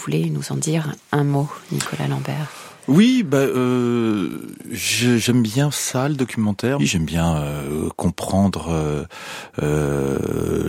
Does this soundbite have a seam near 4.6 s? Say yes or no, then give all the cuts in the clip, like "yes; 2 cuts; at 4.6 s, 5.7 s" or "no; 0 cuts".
no; 1 cut; at 6.8 s